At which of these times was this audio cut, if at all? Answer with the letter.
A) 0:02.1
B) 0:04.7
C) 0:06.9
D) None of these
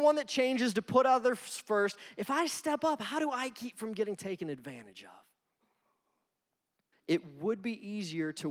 C